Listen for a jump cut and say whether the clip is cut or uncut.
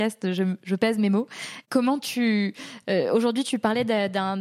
uncut